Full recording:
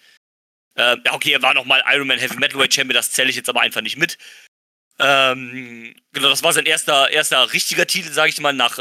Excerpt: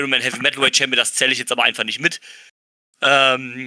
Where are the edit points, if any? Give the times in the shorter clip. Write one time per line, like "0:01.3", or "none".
none